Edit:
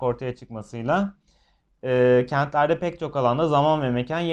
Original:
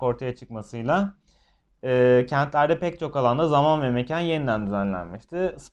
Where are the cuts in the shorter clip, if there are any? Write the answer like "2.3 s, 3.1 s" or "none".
none